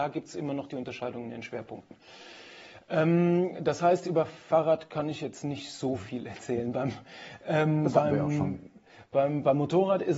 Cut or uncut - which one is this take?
uncut